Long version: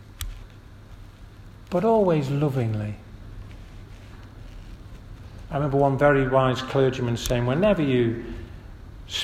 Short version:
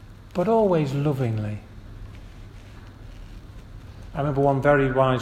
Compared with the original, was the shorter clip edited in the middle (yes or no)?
no